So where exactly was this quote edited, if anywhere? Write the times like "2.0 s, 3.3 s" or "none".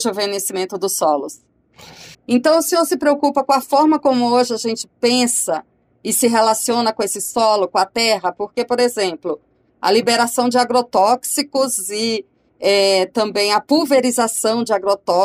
2.1 s